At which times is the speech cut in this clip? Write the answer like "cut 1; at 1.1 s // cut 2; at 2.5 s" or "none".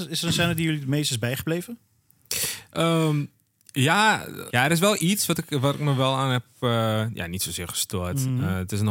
cut 1; at 4.5 s